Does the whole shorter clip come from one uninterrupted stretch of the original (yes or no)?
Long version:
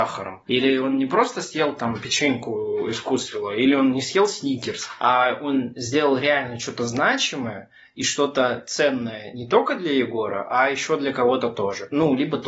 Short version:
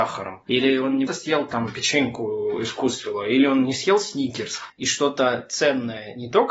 no